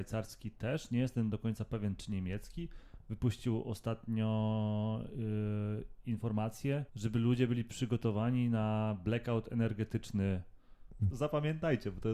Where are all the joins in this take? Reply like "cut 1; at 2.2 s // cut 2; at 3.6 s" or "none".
cut 1; at 6.9 s // cut 2; at 11.1 s

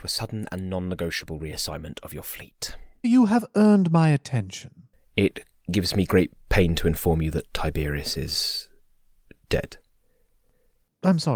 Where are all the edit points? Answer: cut 1; at 3.0 s

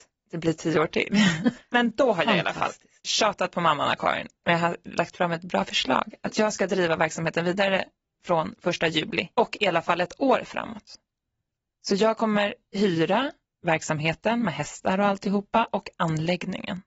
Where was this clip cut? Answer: cut 1; at 1.6 s // cut 2; at 4.4 s // cut 3; at 9.3 s

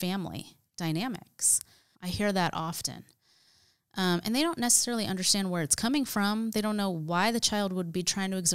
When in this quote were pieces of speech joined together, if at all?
cut 1; at 1.9 s

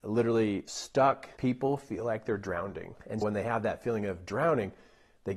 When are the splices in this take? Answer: cut 1; at 1.4 s // cut 2; at 3.2 s

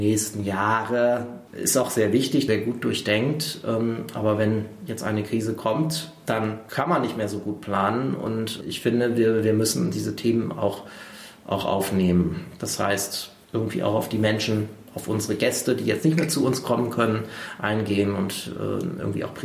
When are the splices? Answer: cut 1; at 2.5 s

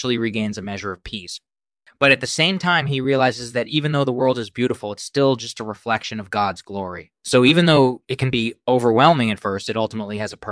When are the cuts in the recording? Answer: none

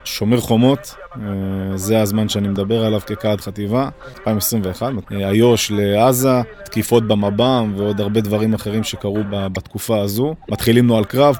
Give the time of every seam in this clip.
cut 1; at 5.0 s // cut 2; at 9.2 s // cut 3; at 10.4 s

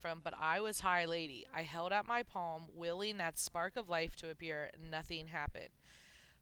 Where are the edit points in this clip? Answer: none

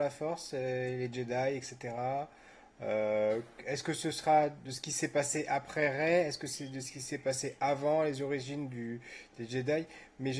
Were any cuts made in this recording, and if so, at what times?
none

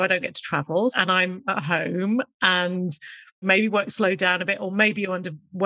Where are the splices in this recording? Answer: cut 1; at 0.9 s

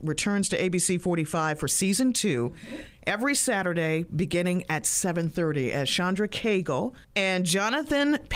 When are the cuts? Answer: cut 1; at 7.0 s

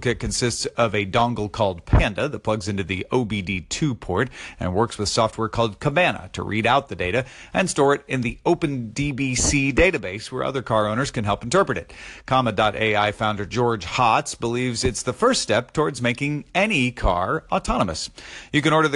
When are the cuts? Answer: none

